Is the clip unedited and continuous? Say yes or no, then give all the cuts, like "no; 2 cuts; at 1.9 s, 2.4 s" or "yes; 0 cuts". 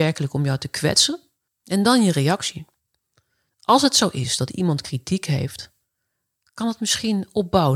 no; 1 cut; at 1.5 s